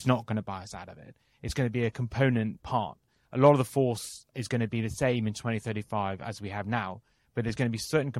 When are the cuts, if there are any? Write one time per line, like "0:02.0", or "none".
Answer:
none